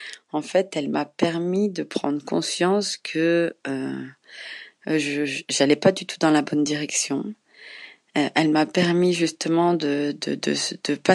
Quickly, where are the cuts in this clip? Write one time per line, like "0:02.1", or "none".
none